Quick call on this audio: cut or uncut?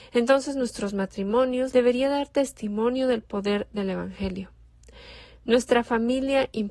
cut